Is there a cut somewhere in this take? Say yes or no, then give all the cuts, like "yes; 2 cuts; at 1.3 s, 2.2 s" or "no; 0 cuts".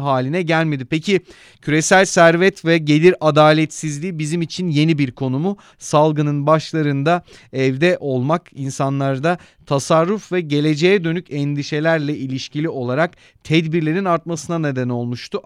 yes; 1 cut; at 5.7 s